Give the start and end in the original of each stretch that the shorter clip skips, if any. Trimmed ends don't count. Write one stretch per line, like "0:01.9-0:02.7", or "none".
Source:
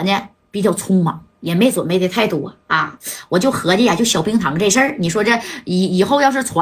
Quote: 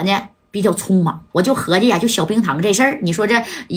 0:01.3-0:03.3